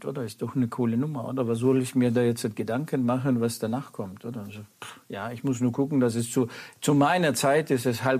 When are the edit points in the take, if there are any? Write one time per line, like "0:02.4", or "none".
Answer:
none

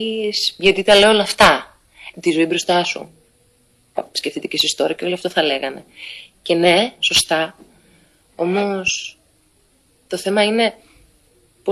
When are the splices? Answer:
0:02.1
0:07.0

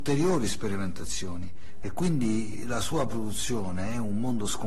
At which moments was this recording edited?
0:01.8

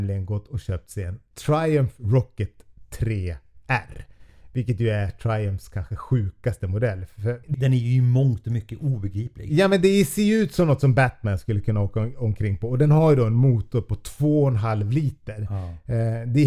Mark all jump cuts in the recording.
0:07.5

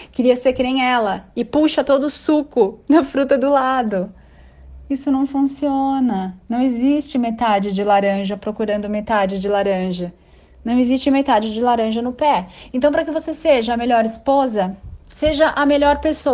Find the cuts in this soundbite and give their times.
none

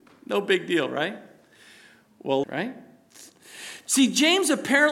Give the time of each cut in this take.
0:02.4

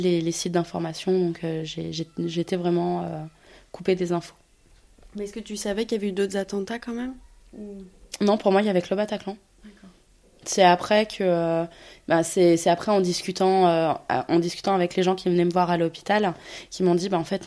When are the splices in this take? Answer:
none

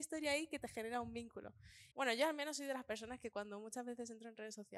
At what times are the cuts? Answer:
0:01.9

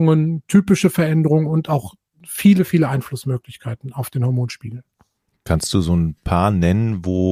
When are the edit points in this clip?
none

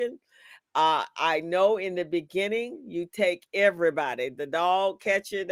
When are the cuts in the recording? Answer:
none

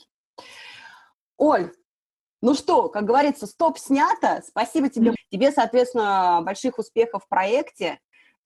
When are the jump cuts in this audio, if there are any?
0:05.2

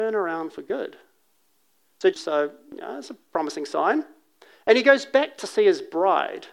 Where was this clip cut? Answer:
0:02.1

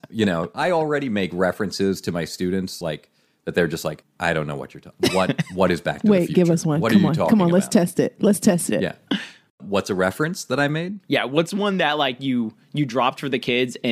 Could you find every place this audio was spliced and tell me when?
none

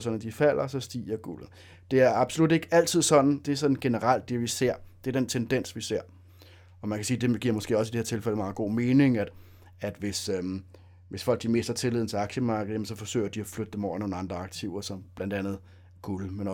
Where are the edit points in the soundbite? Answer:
0:03.4

